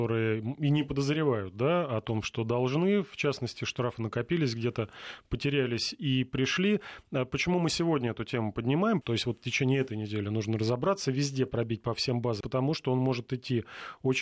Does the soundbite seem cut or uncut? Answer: cut